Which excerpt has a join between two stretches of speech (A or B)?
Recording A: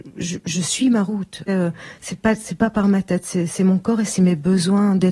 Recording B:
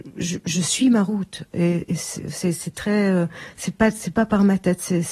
A